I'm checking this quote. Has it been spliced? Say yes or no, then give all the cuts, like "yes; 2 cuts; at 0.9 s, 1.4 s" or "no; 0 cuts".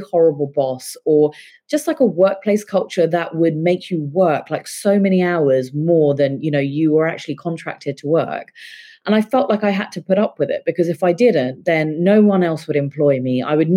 no; 0 cuts